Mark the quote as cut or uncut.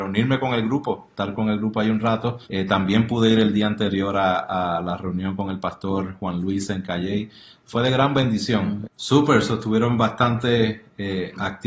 cut